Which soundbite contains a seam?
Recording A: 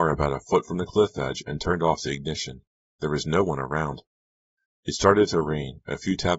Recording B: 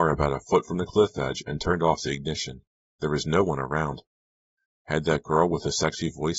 B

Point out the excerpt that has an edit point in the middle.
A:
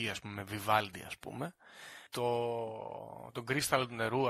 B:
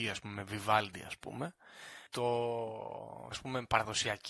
B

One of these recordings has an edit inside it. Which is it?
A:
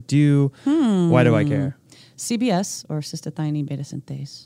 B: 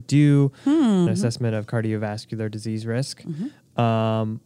B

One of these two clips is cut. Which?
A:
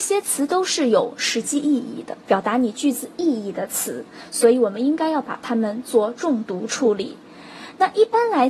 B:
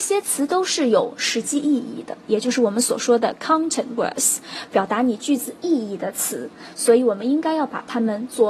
A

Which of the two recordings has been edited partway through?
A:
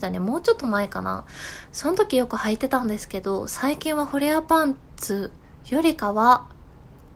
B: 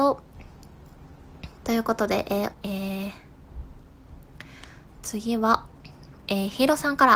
B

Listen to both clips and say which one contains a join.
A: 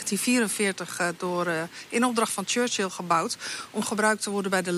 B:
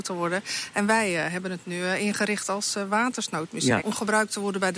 B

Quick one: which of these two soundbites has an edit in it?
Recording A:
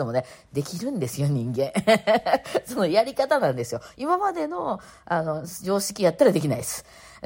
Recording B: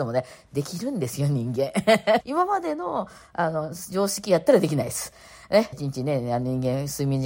B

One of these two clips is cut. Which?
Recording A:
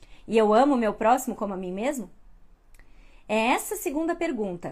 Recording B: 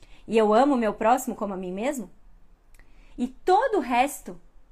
B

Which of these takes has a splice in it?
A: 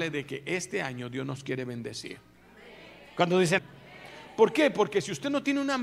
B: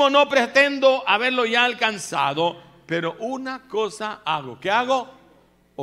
A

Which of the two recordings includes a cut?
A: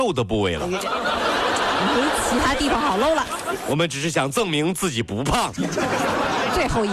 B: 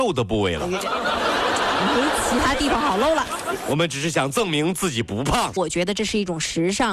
B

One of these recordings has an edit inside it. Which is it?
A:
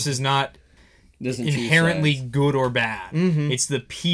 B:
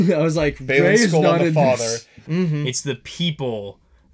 B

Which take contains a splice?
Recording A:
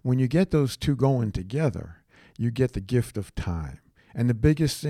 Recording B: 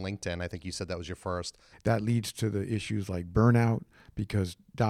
B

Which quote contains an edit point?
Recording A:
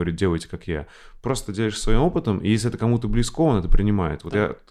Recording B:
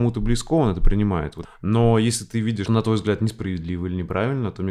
B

